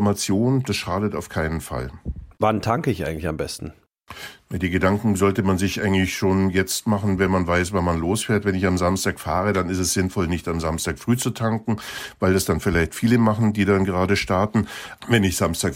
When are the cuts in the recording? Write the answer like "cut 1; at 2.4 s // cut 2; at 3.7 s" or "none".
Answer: none